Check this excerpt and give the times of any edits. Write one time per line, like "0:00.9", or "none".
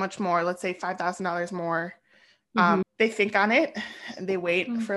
0:02.8